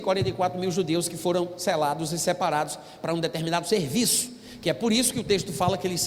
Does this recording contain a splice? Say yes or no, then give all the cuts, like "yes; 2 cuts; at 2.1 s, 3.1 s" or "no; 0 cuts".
no; 0 cuts